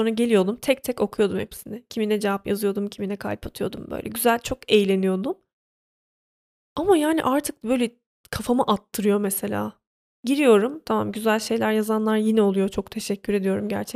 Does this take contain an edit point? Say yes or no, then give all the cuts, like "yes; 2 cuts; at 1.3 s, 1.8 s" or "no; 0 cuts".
no; 0 cuts